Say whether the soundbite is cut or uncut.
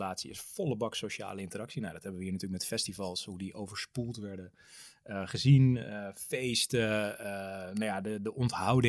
uncut